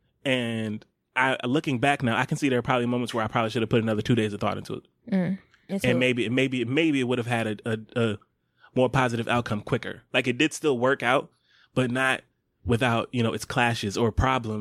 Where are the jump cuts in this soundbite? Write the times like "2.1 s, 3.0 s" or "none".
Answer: none